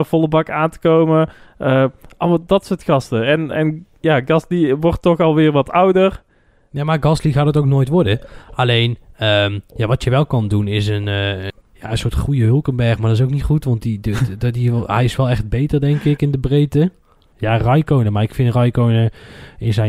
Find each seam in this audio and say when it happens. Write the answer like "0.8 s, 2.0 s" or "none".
none